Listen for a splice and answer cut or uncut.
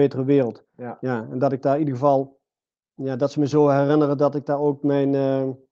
uncut